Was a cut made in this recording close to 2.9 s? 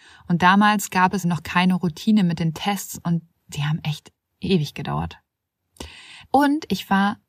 no; 2 cuts; at 1.2 s, 6.2 s

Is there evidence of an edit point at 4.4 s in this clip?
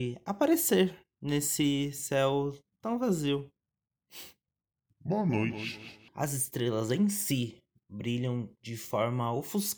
no; 1 cut; at 6.1 s

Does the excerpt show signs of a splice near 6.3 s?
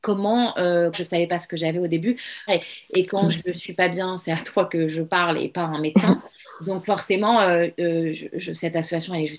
no; 2 cuts; at 0.9 s, 2.5 s

